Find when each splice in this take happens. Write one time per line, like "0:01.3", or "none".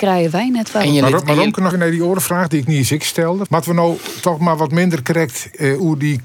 0:01.7
0:03.5